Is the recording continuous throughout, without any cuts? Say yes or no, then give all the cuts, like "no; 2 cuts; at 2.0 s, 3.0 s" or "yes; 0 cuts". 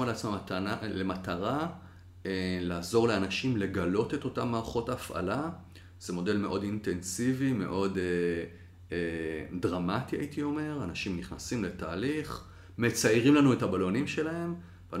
yes; 0 cuts